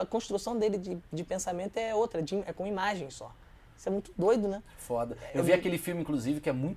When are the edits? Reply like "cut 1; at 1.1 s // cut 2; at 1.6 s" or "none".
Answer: none